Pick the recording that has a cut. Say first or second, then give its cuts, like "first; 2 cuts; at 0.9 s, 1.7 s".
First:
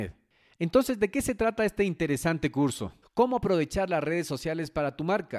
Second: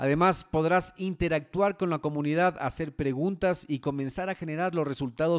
first; 1 cut; at 3.0 s